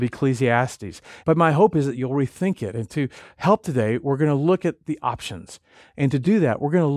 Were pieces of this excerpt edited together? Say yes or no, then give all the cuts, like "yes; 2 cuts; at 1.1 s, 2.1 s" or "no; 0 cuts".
yes; 1 cut; at 1.2 s